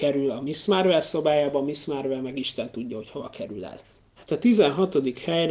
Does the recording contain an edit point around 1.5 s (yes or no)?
no